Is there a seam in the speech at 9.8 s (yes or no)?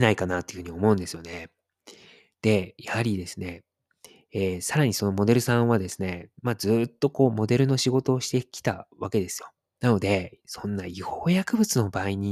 yes